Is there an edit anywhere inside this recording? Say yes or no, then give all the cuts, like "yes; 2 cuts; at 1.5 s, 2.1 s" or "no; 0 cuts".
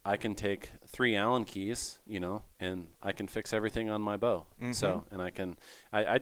yes; 1 cut; at 2.5 s